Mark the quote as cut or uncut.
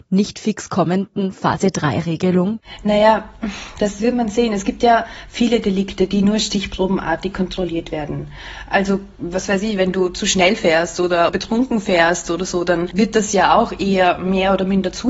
uncut